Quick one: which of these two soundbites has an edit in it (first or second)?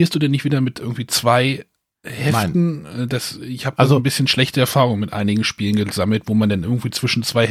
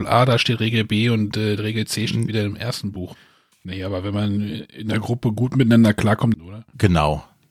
second